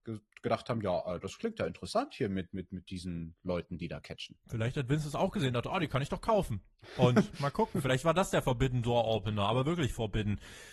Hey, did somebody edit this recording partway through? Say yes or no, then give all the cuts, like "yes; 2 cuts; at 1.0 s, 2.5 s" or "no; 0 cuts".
no; 0 cuts